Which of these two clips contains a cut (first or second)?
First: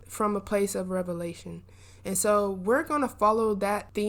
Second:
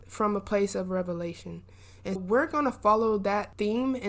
second